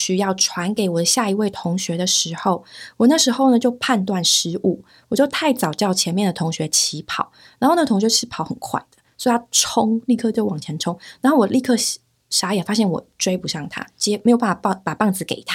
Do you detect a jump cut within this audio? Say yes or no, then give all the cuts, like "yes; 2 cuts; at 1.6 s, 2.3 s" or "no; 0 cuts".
no; 0 cuts